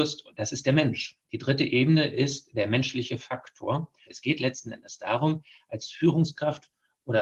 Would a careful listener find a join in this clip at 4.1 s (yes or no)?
yes